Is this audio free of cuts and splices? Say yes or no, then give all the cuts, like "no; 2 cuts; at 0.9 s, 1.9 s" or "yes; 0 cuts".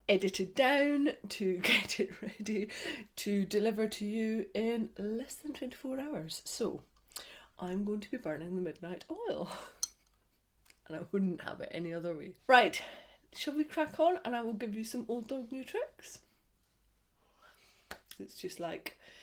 no; 2 cuts; at 12.4 s, 18.2 s